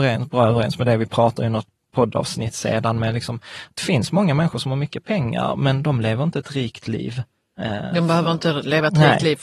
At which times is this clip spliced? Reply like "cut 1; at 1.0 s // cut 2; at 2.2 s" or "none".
none